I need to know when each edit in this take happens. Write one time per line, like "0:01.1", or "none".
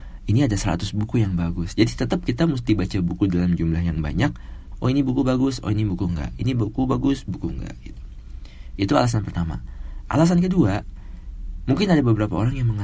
0:04.7